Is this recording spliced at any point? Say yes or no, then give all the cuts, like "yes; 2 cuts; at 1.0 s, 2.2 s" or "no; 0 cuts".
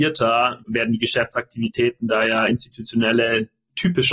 no; 0 cuts